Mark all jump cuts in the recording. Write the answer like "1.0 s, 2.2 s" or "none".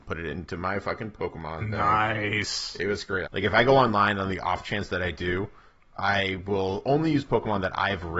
3.2 s

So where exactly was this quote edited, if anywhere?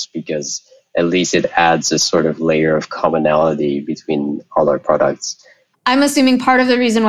5.7 s

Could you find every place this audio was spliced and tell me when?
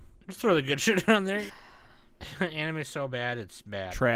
1.5 s

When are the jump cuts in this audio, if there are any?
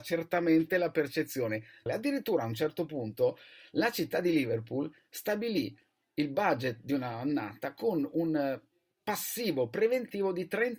1.9 s

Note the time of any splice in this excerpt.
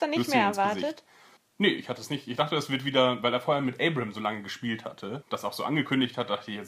none

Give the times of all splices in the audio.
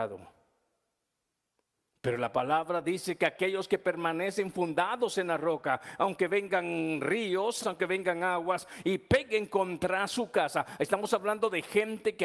7.6 s

